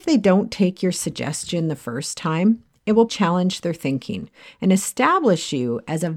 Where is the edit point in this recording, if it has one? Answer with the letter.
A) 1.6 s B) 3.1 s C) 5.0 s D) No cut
B